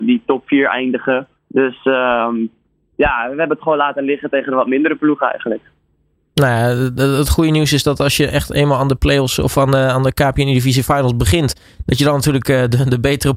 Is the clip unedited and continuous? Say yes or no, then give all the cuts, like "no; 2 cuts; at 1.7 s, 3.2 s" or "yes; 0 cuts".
no; 1 cut; at 1.4 s